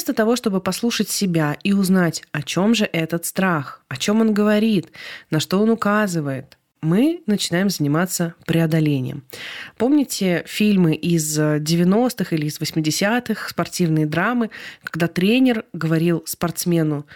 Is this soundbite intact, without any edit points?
yes; 0 cuts

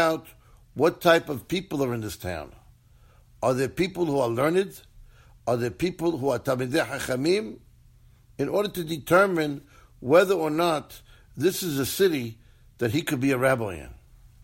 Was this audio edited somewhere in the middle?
no; 0 cuts

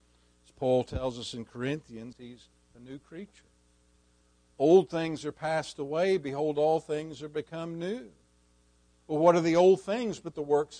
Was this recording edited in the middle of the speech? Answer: yes; 1 cut; at 2.1 s

